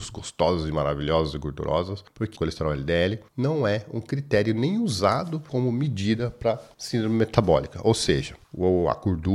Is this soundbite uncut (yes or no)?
yes